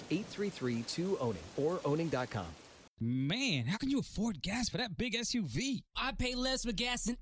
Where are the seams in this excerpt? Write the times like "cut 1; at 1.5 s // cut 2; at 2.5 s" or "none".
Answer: cut 1; at 2.9 s